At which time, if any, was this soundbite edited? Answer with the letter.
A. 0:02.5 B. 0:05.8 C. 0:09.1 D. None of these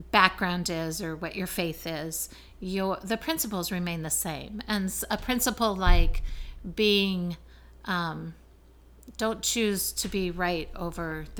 C